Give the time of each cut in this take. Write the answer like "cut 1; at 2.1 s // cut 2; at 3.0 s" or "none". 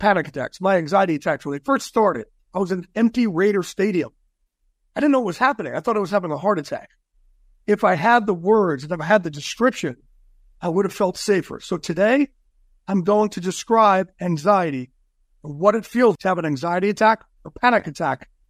cut 1; at 2.4 s // cut 2; at 16.2 s